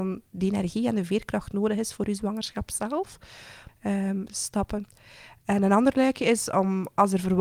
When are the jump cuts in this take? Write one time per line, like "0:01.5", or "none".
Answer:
0:03.7